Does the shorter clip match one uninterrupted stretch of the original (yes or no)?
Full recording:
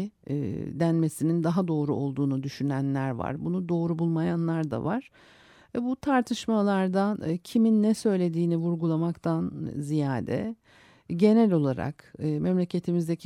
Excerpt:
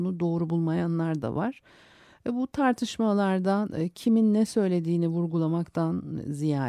yes